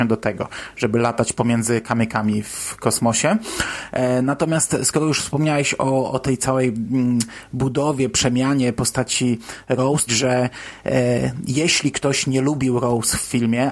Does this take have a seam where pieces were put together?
yes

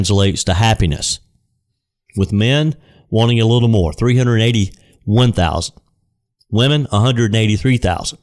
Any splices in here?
no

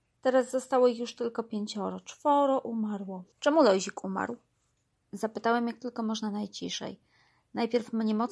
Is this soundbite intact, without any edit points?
no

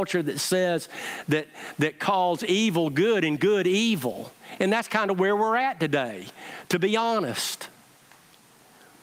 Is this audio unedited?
yes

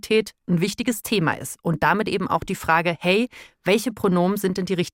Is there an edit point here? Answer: no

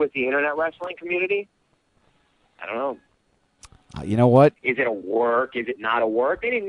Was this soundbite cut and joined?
yes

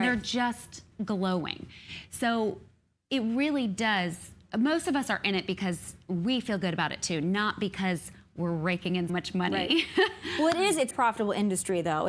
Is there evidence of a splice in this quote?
yes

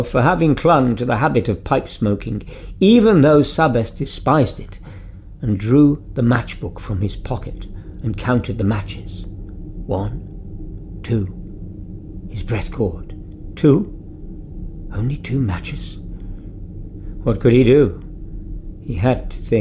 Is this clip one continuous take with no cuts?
no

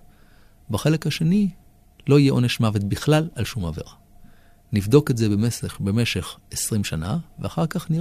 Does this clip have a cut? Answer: no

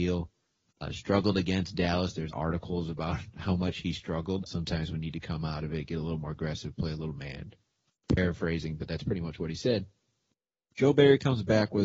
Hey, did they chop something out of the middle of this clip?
yes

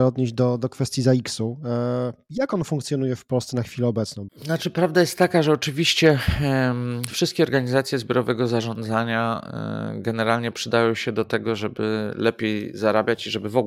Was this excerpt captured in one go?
no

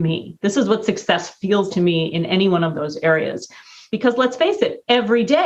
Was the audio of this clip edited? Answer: yes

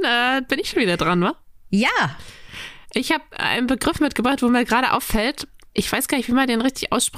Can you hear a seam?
no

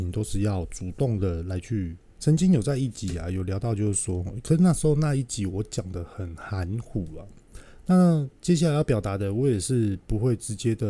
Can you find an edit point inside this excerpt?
yes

